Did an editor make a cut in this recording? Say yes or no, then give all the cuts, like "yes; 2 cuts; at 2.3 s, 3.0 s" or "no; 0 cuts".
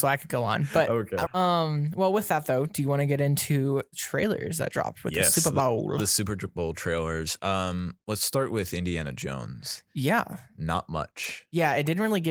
yes; 1 cut; at 1.3 s